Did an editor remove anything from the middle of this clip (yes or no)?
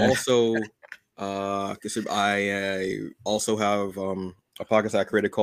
no